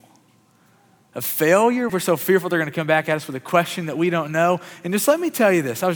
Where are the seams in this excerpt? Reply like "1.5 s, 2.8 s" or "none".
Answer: 1.9 s